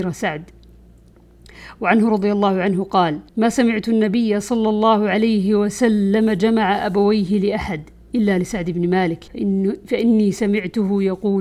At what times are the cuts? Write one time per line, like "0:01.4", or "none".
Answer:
0:03.3
0:09.3